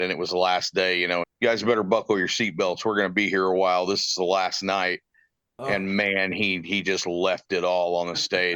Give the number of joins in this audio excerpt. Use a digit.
1